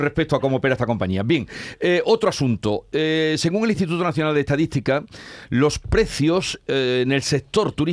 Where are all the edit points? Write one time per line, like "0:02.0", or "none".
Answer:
none